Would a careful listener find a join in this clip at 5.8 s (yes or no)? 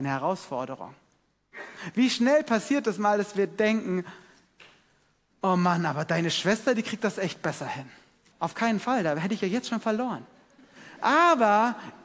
no